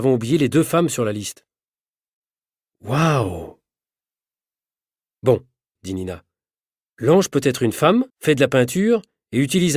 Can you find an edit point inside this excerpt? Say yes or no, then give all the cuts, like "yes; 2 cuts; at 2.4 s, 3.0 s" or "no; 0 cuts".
yes; 2 cuts; at 5.8 s, 8.1 s